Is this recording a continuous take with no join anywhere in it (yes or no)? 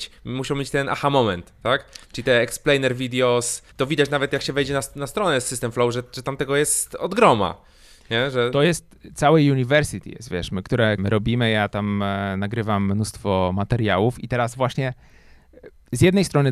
no